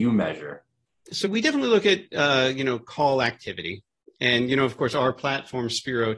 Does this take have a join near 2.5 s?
no; 1 cut; at 1.2 s

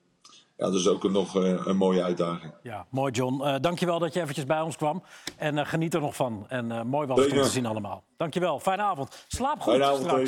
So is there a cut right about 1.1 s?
no; 0 cuts

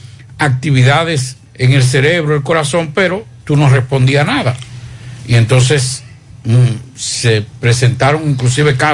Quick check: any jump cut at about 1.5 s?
yes; 1 cut; at 1.5 s

